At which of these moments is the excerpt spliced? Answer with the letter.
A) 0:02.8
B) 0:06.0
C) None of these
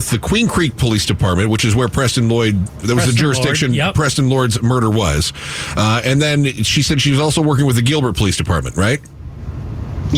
A